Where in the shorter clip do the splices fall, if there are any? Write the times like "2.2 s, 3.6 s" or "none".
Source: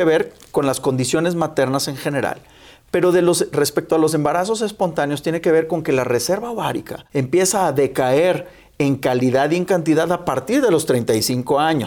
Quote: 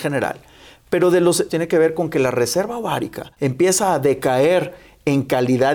1.5 s